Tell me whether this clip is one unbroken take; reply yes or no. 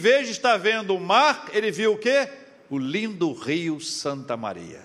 yes